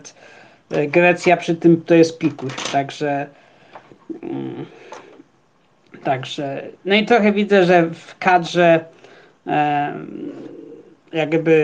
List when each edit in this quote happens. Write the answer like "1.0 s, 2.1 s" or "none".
none